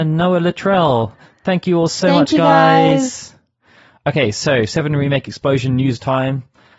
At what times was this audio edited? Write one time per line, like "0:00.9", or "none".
none